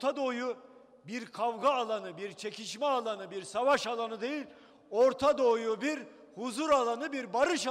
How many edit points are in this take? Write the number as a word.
zero